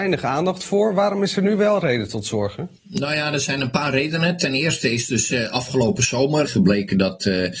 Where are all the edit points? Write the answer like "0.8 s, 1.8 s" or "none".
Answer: 2.8 s, 6.4 s

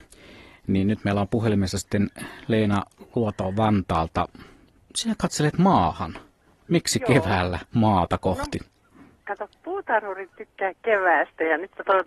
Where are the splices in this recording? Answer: none

